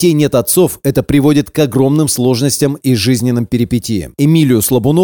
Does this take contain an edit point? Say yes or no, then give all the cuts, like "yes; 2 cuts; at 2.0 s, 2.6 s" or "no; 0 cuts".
yes; 1 cut; at 4.1 s